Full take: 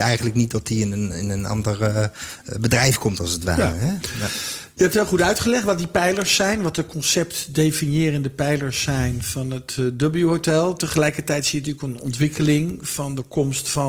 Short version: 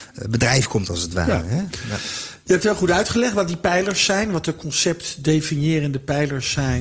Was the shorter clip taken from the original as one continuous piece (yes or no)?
yes